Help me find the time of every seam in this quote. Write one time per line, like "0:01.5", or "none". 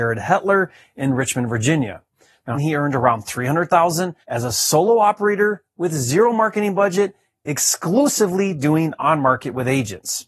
0:02.5
0:04.2